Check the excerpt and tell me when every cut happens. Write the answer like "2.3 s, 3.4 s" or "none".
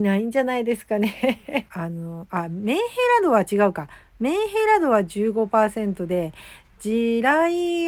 1.7 s